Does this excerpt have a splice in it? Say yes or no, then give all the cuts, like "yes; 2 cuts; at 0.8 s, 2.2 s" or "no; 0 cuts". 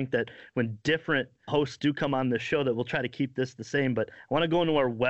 yes; 1 cut; at 1.5 s